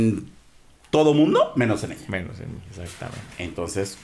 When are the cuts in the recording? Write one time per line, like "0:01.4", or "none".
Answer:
none